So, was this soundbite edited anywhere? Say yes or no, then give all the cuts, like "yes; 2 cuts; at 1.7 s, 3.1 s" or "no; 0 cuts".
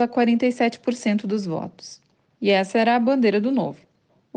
yes; 1 cut; at 2.2 s